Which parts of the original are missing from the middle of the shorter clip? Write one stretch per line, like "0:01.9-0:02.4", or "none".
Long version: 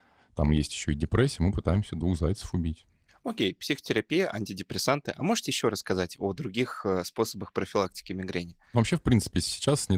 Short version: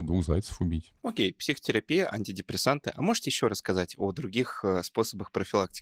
0:02.9-0:03.2